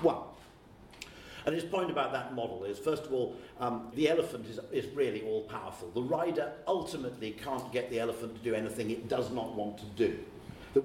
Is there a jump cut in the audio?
yes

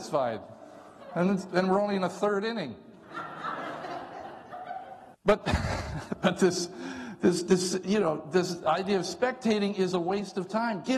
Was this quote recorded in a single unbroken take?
no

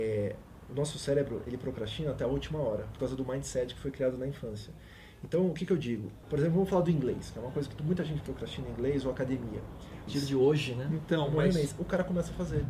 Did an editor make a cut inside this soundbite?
yes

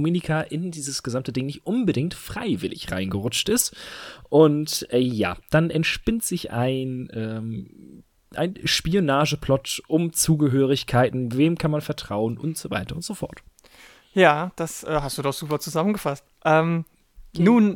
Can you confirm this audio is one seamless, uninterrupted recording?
yes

